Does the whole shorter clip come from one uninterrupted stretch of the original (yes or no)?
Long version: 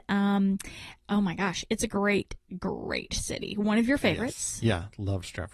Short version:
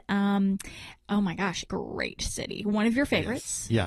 no